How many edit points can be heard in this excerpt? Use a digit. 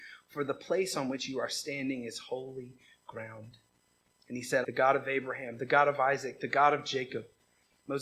1